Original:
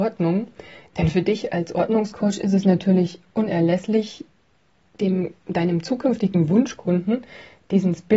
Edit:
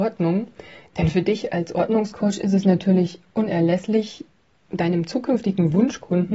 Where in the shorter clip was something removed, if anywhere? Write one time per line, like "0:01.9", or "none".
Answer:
0:04.6